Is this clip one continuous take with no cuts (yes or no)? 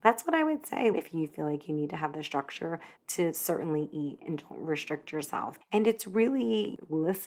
no